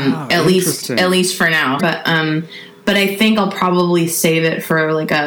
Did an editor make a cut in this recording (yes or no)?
yes